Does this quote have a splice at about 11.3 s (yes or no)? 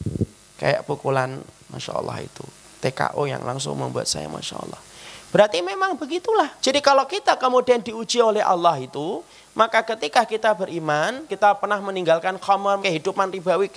yes